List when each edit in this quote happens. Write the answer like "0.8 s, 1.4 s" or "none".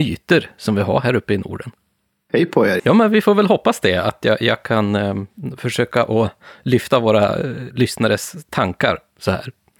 2.8 s